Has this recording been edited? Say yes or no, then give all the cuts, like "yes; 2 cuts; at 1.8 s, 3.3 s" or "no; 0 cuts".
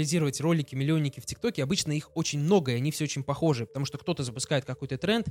no; 0 cuts